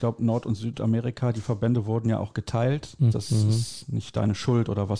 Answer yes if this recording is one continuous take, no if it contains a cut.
no